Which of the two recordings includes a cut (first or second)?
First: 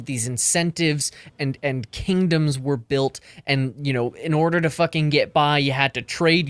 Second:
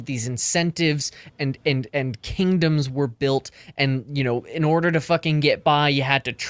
first